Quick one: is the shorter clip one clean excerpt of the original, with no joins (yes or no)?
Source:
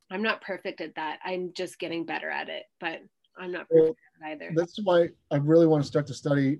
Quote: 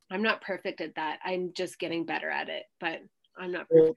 yes